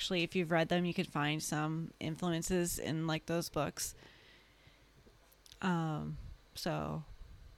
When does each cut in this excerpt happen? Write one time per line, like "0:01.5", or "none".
none